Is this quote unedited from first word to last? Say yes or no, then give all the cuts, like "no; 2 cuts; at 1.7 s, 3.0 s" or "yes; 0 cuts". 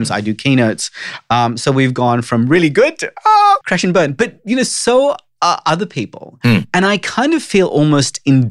no; 1 cut; at 3.6 s